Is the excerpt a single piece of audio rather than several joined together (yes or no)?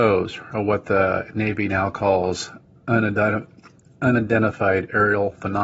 yes